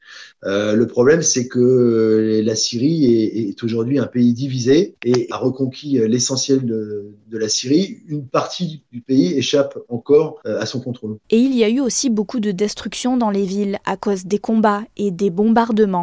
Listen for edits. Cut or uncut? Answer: cut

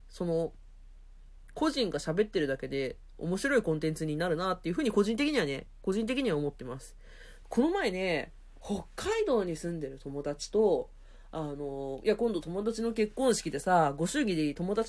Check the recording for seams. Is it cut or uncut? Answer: uncut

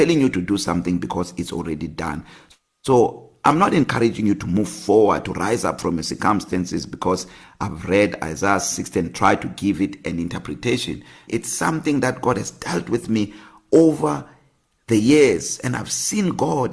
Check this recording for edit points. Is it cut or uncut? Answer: cut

